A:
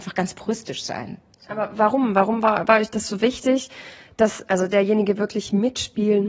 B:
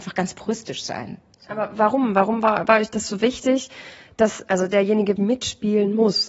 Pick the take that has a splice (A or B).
B